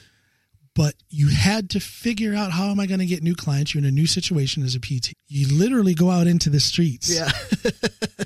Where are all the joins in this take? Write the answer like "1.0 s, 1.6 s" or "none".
5.1 s